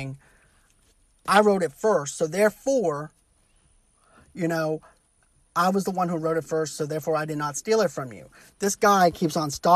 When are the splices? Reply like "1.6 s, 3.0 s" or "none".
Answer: none